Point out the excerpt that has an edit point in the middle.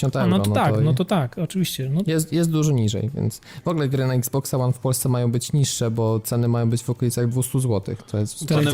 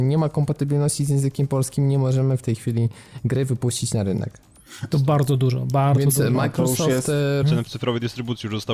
second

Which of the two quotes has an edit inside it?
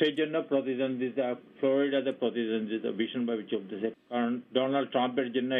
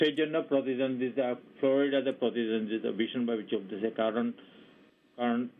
first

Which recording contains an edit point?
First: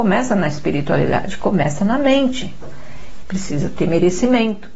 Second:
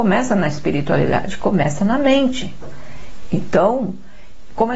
first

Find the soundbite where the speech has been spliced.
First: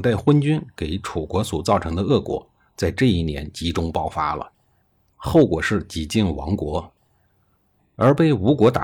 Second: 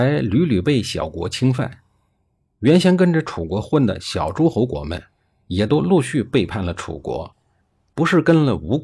first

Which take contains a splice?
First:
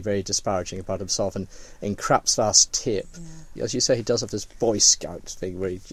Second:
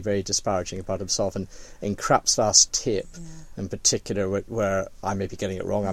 first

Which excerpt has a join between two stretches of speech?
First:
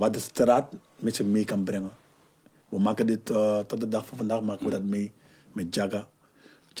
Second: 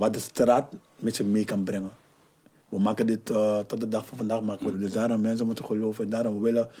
second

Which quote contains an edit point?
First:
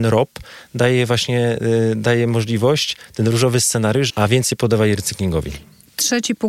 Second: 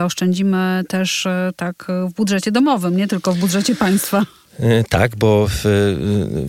first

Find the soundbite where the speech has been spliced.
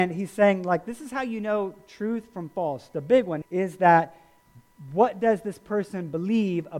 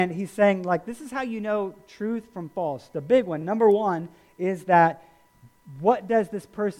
first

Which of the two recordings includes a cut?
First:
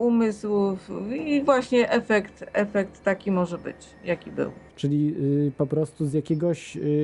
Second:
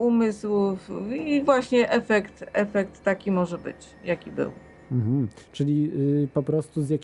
first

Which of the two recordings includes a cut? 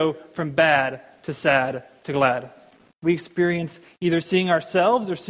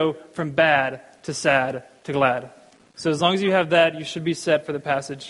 first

